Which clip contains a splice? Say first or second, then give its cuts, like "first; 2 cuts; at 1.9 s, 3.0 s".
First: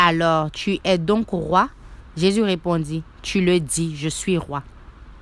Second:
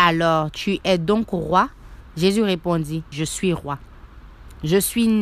second; 1 cut; at 3.1 s